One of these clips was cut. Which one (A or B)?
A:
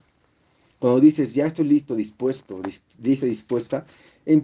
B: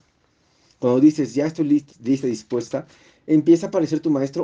B